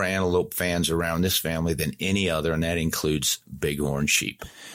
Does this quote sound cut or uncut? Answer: uncut